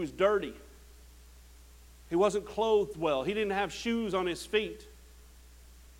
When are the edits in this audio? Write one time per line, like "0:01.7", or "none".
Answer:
none